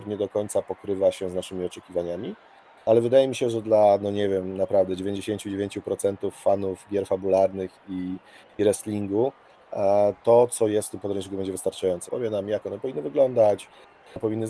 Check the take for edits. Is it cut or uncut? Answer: cut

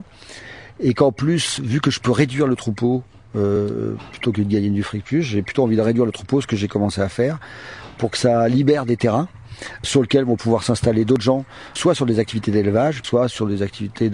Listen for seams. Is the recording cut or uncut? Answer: cut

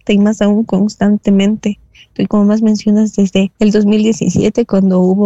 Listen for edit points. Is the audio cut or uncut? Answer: cut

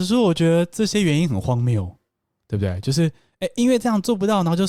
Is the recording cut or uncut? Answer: uncut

